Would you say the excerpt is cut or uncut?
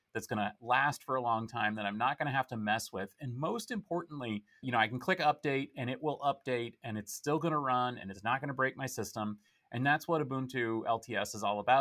cut